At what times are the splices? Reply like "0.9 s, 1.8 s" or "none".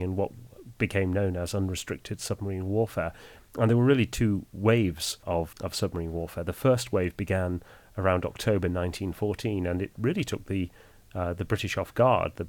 none

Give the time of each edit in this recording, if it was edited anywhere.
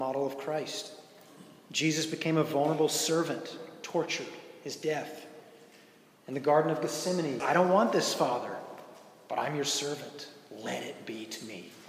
7.4 s

